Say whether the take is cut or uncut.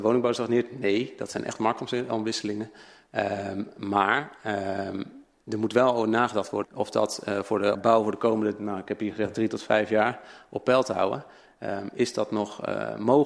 cut